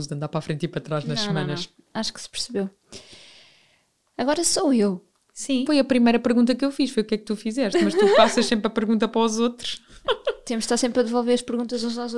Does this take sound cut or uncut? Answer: cut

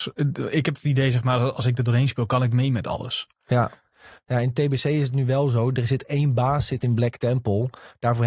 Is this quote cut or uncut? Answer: uncut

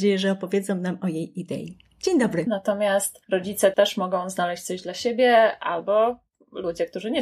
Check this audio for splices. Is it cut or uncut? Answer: cut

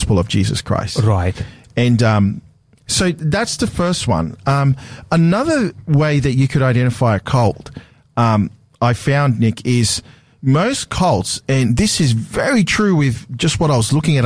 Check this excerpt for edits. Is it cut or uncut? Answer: uncut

